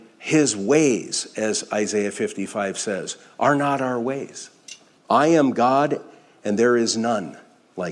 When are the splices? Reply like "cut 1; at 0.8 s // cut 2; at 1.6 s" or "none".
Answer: cut 1; at 5.0 s